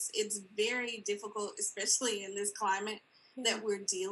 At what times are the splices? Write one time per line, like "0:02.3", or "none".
none